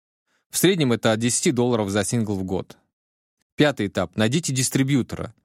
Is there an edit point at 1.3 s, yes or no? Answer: no